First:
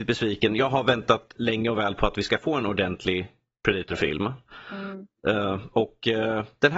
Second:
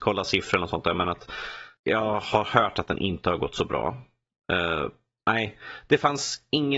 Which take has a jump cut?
second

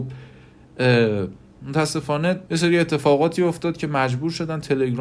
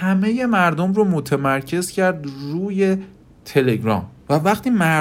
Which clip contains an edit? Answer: first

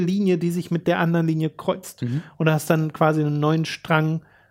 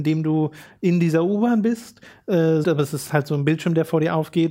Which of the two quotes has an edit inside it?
second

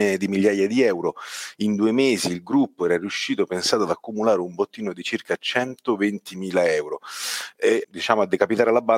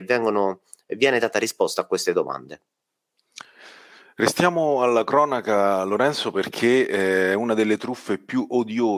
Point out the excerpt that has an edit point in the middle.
first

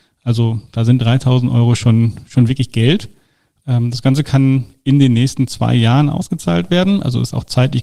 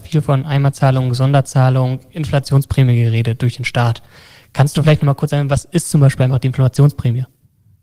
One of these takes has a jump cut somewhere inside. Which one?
first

